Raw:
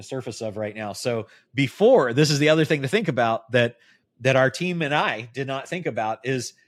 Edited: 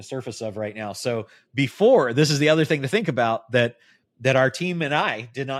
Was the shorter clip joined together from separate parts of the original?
no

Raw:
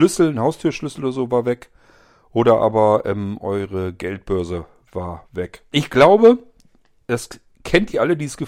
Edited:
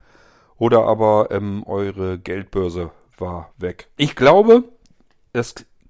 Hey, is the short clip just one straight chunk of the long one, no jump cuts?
yes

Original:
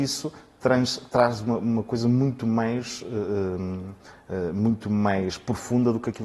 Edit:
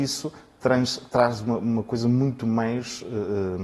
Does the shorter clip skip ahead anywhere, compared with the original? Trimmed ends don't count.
no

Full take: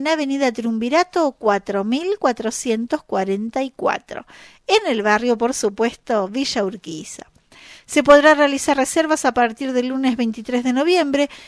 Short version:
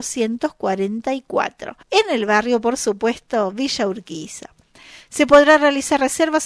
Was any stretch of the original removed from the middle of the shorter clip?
yes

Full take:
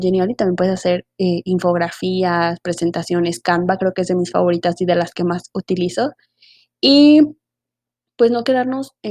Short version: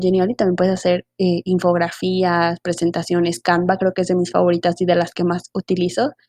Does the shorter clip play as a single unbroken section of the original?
yes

